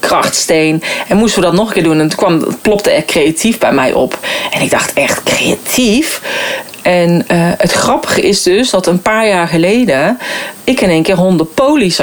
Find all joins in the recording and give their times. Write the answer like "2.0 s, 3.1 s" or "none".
6.8 s, 10.6 s